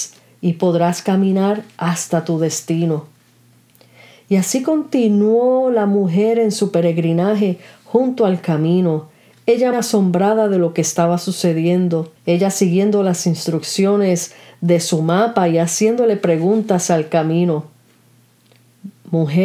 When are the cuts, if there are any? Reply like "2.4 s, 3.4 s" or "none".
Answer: 9.7 s, 12.2 s